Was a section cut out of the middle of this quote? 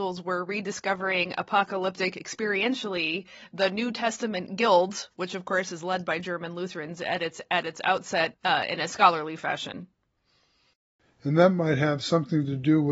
yes; 1 cut; at 8.3 s

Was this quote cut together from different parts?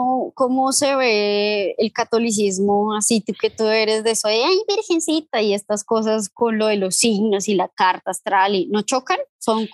no; 0 cuts

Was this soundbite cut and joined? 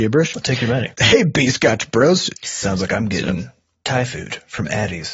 yes; 2 cuts; at 0.9 s, 2.3 s

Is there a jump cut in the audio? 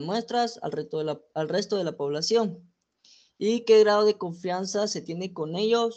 no; 0 cuts

